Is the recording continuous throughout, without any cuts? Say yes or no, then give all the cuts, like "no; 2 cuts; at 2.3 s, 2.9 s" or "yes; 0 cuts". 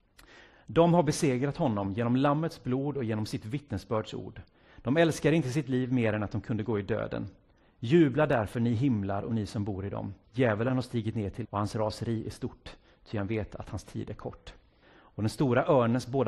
no; 3 cuts; at 10.2 s, 11.4 s, 14.8 s